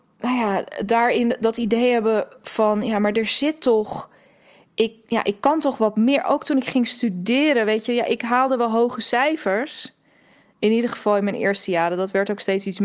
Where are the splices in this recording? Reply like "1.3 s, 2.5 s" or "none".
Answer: none